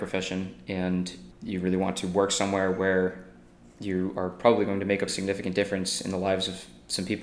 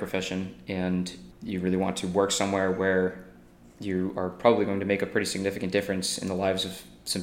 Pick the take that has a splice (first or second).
first